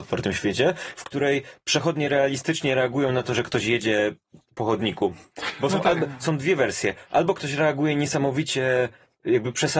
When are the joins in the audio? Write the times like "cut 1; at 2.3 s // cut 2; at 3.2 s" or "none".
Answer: none